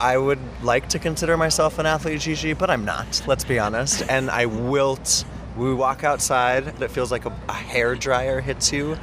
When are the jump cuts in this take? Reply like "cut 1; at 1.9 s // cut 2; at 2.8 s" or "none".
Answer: none